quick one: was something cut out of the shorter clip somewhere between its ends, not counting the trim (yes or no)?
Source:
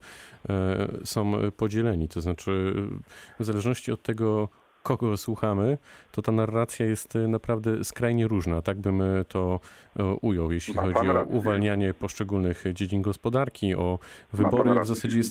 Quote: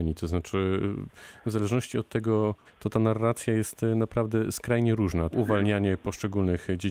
yes